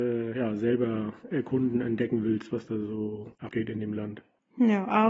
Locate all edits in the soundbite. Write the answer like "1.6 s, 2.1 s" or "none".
none